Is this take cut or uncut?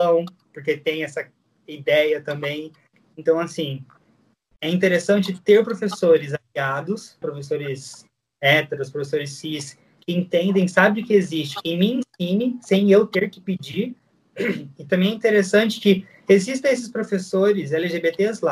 cut